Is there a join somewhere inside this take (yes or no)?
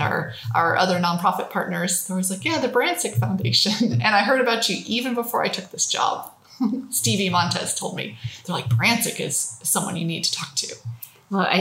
no